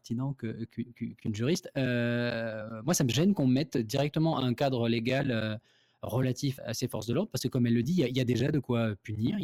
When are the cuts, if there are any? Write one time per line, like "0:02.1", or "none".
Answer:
0:06.6